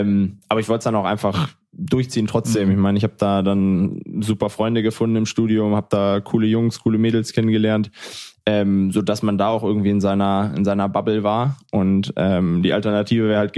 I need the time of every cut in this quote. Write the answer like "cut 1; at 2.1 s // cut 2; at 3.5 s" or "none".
none

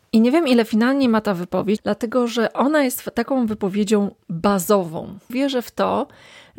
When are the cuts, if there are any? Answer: cut 1; at 1.8 s // cut 2; at 5.3 s

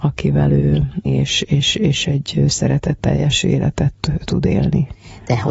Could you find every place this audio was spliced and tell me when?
cut 1; at 1.1 s

